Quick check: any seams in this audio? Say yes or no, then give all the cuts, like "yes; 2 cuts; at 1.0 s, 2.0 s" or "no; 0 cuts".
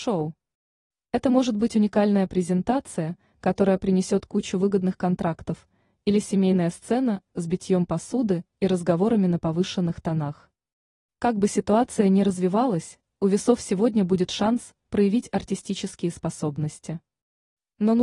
no; 0 cuts